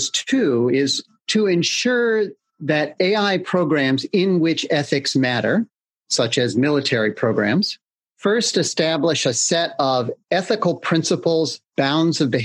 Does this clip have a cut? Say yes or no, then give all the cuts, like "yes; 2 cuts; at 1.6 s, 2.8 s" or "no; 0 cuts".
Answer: no; 0 cuts